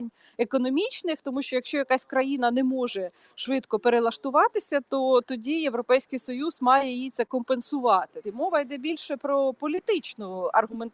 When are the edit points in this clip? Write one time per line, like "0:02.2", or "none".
0:08.2